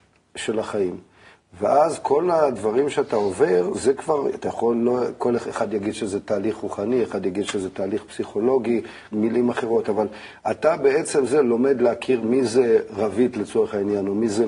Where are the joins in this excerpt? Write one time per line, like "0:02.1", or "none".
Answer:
0:09.1